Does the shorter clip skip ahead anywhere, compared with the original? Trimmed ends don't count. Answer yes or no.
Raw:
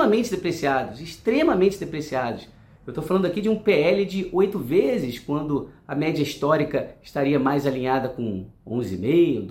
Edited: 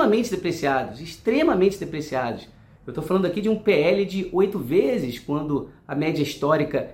no